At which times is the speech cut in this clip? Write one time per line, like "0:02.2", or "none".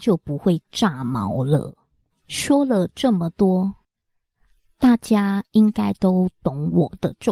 0:02.1